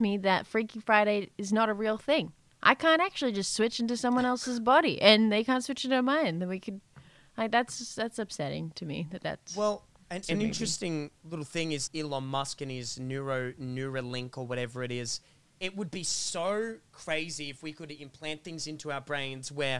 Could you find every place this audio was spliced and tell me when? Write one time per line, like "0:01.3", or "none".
0:10.2
0:11.9